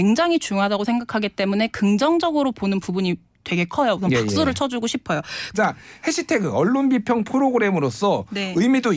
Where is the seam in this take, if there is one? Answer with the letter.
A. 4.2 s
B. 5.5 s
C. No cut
B